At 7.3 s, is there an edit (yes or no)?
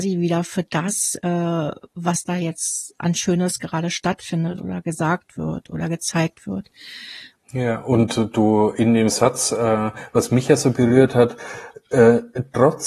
yes